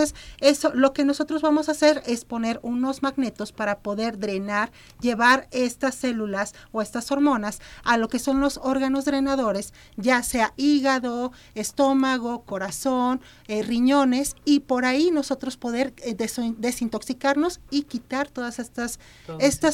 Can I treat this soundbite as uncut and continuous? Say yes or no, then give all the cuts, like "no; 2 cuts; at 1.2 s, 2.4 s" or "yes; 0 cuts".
yes; 0 cuts